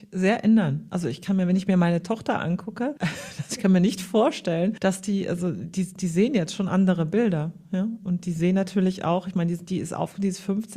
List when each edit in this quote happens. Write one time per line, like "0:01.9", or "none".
none